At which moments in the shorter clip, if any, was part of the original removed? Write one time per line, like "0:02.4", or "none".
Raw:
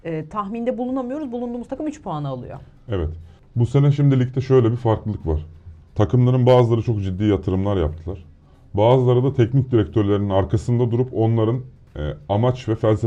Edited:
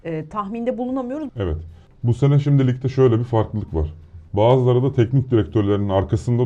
0:01.3
0:04.3